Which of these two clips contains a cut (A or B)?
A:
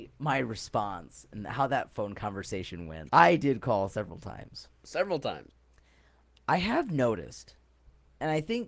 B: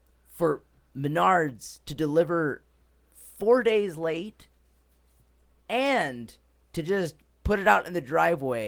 A